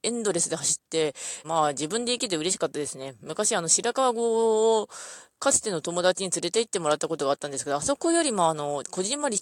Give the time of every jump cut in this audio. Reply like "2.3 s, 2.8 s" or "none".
1.4 s

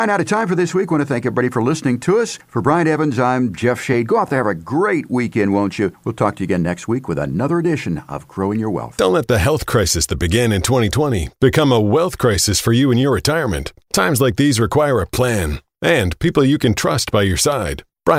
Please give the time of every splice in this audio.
none

